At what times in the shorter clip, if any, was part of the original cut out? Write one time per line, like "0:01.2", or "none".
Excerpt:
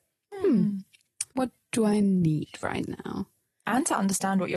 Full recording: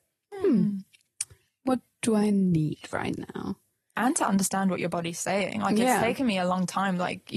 0:01.3